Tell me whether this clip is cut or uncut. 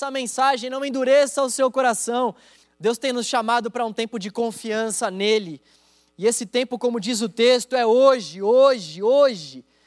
cut